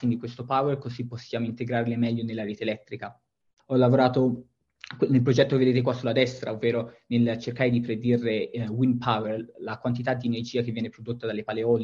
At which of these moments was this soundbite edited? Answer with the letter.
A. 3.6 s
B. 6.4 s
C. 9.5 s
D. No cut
A